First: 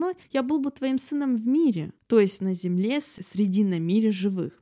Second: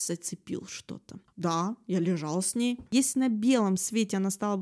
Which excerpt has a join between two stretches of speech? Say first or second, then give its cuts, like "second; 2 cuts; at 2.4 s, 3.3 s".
second; 2 cuts; at 1.3 s, 2.9 s